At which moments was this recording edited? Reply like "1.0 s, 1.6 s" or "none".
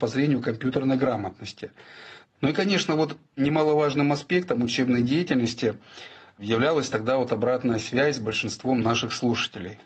2.2 s